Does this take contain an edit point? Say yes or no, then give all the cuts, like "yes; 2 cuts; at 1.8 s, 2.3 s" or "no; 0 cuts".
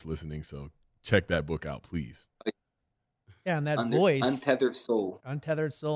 no; 0 cuts